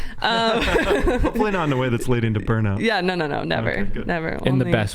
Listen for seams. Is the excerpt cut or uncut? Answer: uncut